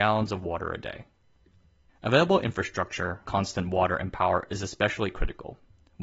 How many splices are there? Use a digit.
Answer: 2